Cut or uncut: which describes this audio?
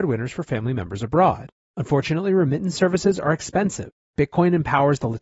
cut